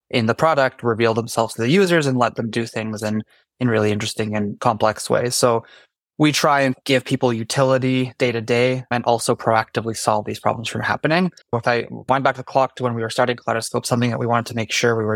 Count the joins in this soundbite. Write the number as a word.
one